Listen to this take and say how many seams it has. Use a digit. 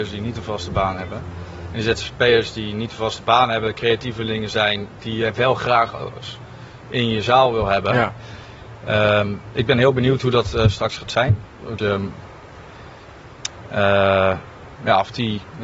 1